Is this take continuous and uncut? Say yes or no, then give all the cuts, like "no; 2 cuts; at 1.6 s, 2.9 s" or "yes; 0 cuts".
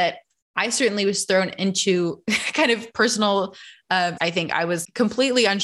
no; 1 cut; at 4.2 s